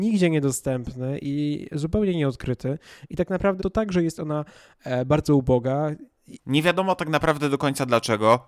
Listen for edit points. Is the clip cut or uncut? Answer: cut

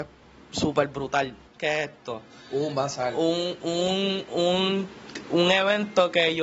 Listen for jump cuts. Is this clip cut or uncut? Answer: cut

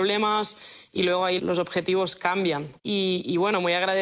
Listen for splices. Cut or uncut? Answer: cut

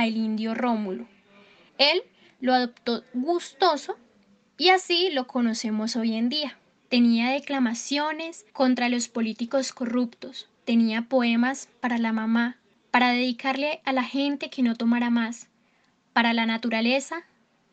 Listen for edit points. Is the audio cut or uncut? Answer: cut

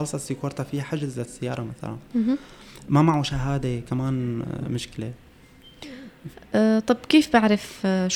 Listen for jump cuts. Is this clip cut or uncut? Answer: uncut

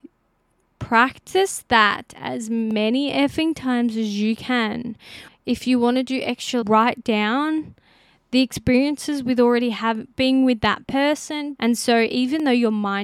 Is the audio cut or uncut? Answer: cut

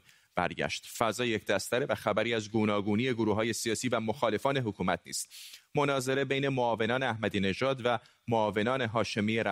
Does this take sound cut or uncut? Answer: uncut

